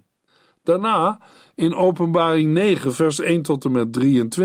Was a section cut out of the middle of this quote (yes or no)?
no